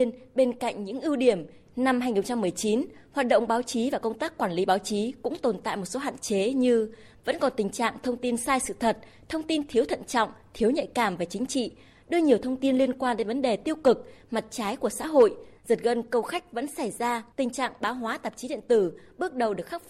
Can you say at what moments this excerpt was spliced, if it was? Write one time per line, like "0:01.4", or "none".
0:17.3